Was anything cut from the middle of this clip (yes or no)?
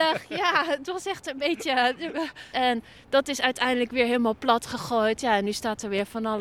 yes